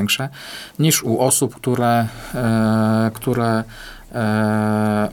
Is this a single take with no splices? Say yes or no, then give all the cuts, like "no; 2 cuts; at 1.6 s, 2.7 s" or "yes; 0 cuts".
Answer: yes; 0 cuts